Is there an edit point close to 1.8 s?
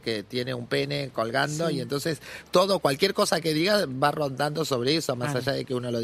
no; 0 cuts

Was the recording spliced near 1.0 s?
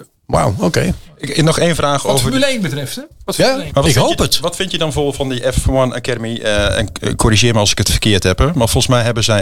no; 1 cut; at 3.7 s

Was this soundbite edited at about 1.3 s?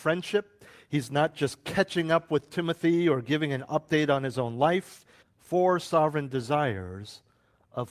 no; 1 cut; at 5.2 s

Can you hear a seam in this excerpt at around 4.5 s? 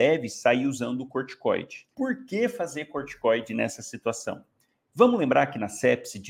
no; 1 cut; at 1.9 s

